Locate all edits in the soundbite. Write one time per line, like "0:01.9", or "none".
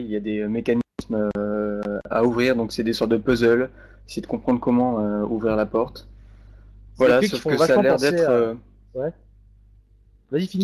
0:02.1